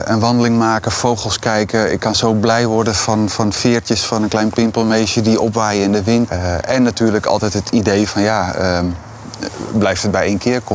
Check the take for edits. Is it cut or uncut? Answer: cut